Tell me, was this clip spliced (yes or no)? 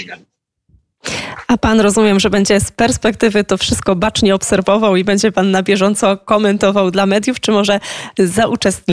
no